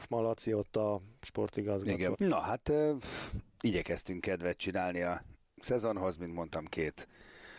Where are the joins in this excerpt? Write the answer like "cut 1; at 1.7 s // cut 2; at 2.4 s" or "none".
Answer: cut 1; at 2.1 s